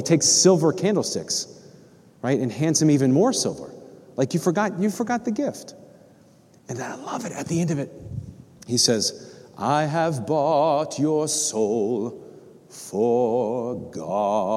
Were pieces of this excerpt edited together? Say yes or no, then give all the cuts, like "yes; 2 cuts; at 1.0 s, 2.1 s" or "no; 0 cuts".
no; 0 cuts